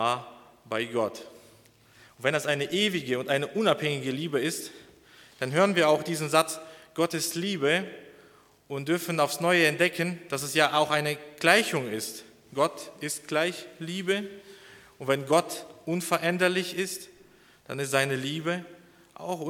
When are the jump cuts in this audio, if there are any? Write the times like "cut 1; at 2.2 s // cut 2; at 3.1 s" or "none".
none